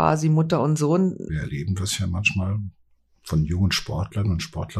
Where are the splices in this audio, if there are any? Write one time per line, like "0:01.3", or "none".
0:01.3